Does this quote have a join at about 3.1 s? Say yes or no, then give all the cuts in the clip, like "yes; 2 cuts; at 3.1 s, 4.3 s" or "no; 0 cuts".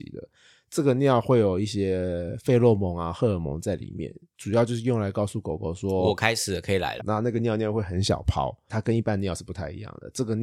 no; 2 cuts; at 7.0 s, 8.7 s